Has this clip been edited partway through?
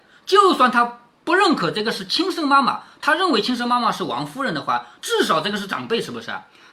no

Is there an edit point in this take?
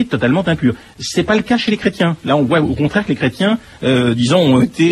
no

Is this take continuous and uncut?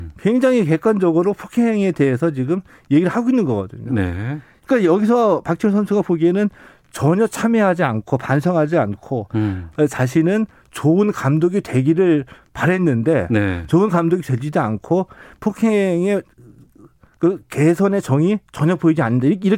yes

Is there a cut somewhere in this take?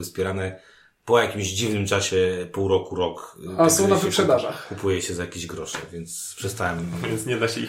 no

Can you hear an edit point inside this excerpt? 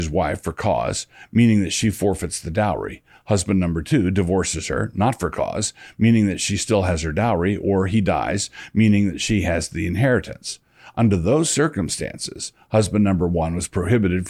no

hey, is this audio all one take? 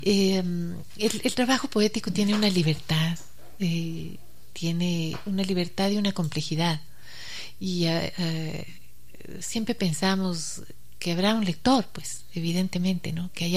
yes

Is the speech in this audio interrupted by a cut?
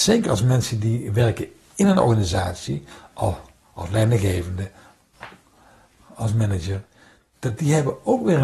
no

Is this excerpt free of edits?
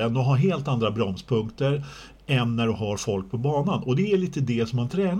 yes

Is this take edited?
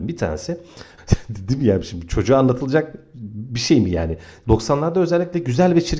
yes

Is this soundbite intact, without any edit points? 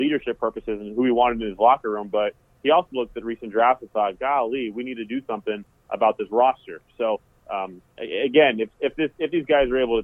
yes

